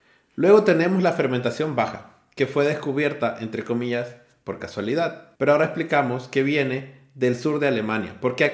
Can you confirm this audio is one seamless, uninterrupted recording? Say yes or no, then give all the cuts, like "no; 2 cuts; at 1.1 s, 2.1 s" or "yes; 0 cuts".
no; 1 cut; at 5.4 s